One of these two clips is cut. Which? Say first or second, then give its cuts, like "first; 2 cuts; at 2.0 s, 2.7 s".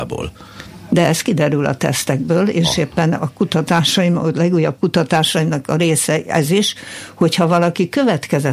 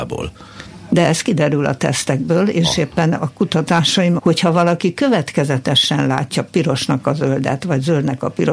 second; 1 cut; at 4.2 s